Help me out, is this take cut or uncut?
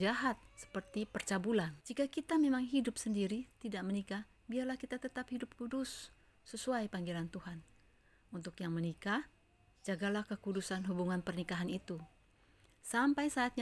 cut